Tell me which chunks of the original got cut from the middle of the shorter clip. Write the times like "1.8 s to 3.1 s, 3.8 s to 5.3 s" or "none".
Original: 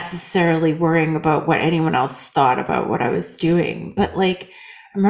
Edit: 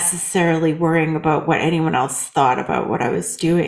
none